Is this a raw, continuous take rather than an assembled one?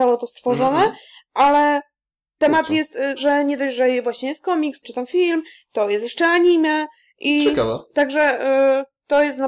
no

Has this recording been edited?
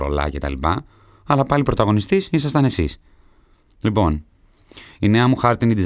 no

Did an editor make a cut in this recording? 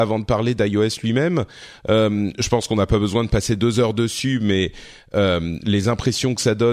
no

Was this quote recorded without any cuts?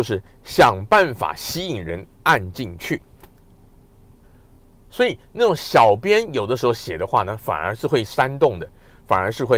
yes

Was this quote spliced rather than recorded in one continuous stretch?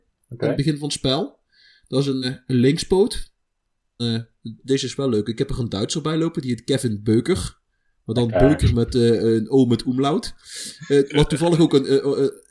yes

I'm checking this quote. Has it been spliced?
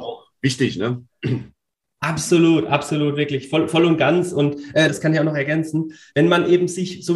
yes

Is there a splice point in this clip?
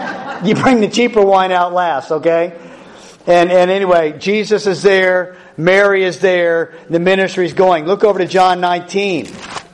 no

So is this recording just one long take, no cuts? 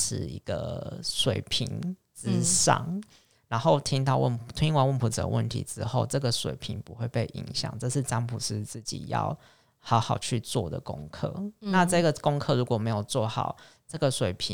yes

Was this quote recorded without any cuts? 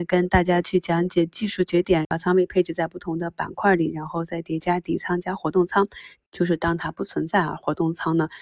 no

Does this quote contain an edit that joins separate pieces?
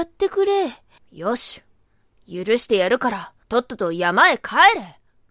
yes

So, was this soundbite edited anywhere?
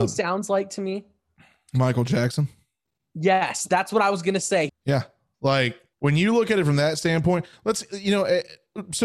yes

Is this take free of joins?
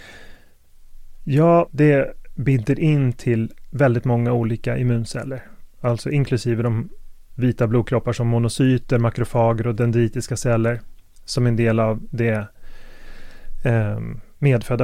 no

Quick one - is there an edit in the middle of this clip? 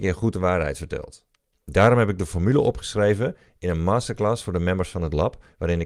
yes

